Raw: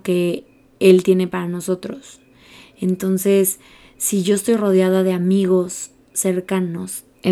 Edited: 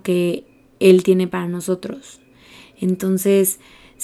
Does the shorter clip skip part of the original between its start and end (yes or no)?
no